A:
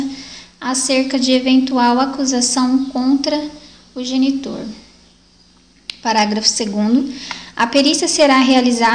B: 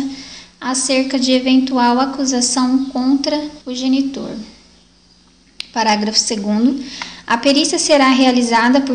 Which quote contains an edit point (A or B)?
B